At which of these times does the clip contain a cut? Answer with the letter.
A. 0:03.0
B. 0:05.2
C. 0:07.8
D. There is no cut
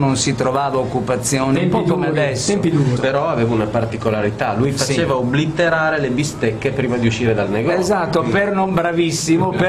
A